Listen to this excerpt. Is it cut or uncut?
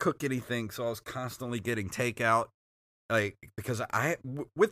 uncut